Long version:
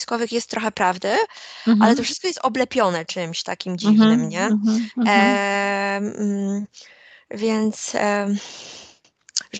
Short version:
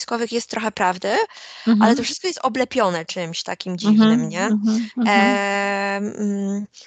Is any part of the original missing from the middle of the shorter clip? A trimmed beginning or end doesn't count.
no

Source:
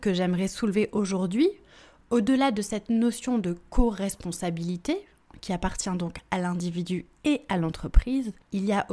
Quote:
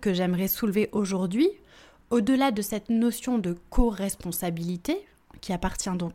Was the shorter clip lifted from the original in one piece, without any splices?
yes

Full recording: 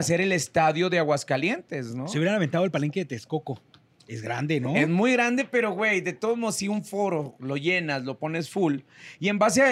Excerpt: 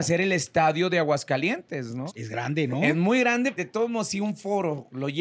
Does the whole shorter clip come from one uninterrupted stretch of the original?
no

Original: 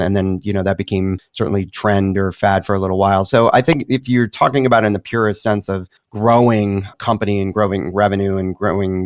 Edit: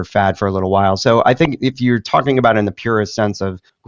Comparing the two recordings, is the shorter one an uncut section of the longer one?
yes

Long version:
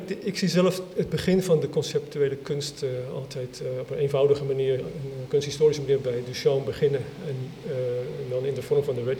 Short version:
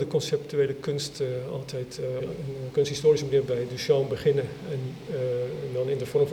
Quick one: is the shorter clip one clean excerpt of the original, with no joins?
no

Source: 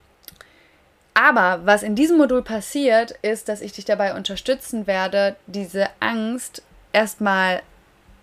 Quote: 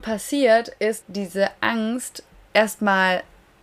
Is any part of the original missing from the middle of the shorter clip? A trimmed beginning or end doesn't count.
yes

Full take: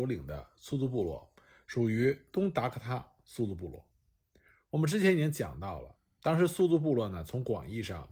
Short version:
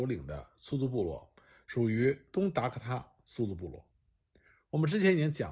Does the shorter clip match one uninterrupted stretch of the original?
yes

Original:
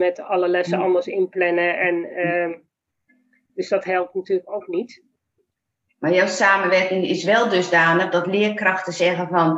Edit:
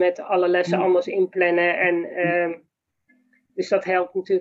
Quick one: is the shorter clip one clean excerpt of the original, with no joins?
yes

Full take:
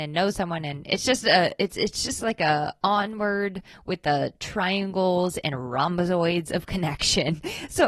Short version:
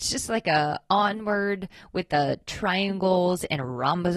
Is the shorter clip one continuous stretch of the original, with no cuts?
yes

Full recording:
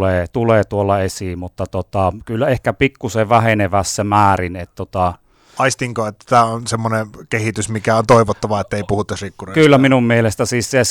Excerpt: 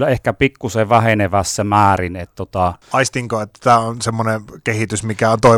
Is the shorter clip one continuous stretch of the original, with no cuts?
no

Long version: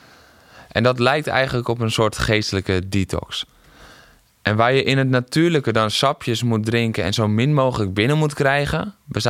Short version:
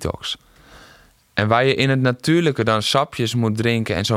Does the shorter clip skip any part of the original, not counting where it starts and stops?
no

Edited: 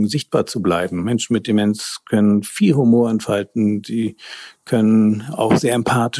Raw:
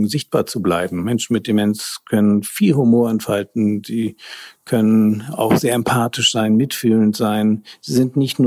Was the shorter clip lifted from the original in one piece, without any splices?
yes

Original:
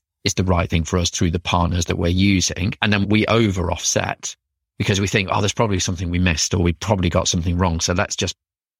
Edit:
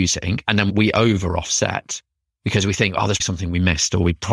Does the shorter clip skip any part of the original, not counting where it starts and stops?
yes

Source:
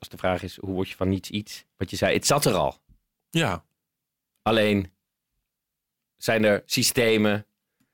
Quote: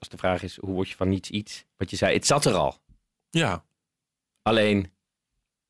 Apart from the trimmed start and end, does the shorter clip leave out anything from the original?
no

